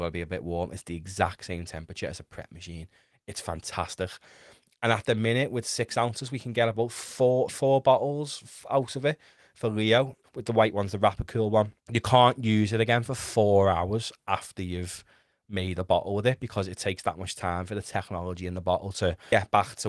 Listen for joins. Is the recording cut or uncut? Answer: cut